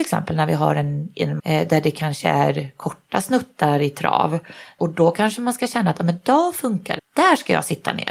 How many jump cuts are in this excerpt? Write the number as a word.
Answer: three